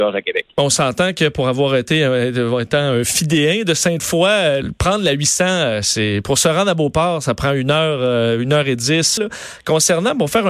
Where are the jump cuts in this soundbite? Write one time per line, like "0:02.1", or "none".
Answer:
0:04.6
0:09.2